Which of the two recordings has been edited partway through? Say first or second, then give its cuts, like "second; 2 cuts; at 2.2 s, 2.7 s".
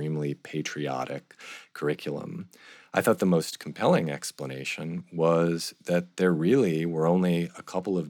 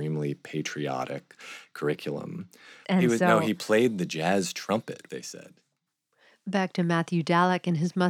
second; 2 cuts; at 2.8 s, 5.1 s